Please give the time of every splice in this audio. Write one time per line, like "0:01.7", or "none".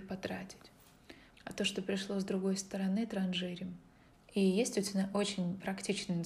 0:01.3
0:04.1